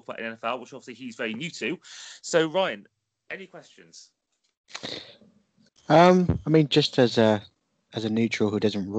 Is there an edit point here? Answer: no; 0 cuts

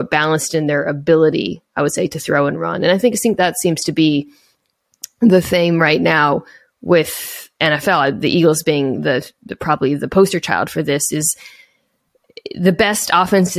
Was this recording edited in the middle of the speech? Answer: no; 0 cuts

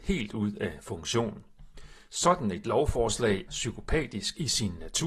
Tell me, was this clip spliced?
yes; 1 cut; at 3.5 s

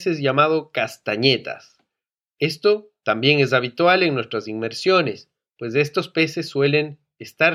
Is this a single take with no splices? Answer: yes; 0 cuts

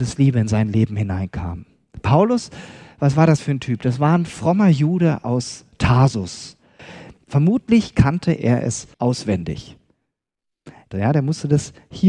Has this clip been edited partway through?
yes; 3 cuts; at 7.2 s, 8.9 s, 10.9 s

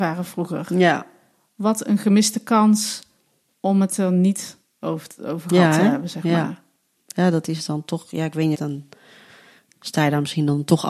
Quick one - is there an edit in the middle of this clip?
yes; 1 cut; at 8.5 s

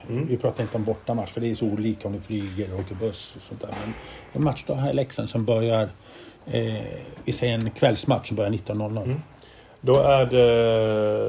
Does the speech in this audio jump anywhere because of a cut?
no; 0 cuts

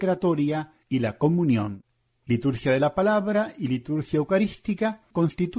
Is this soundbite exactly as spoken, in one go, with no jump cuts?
yes; 0 cuts

